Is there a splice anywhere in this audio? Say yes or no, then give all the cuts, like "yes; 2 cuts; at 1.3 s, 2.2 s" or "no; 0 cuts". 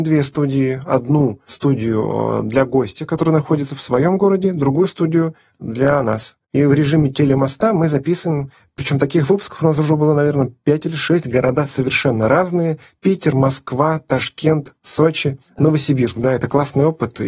no; 0 cuts